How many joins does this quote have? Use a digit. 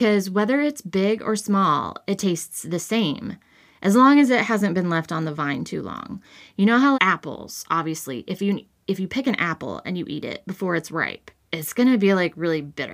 1